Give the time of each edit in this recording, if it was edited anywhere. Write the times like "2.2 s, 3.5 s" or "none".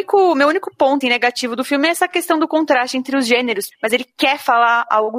1.0 s, 3.7 s